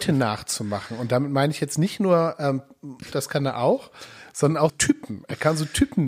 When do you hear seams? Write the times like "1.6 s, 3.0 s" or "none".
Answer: 3.1 s, 4.7 s